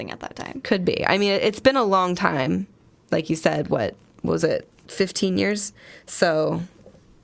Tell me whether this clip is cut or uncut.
uncut